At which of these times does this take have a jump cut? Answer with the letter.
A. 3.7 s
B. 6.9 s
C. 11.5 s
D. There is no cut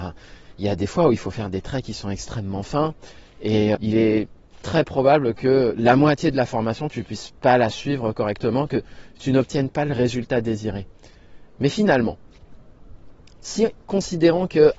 A